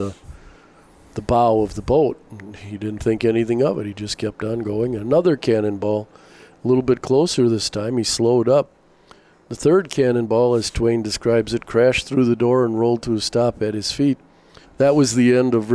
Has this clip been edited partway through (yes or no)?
yes